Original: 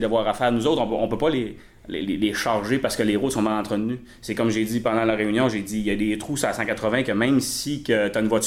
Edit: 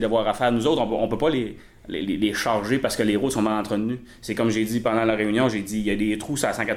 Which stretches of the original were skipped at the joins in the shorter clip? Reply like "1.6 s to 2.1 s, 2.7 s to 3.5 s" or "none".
none